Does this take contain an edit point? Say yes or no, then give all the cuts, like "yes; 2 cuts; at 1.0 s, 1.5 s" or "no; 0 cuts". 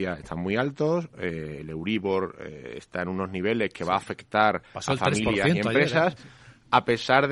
no; 0 cuts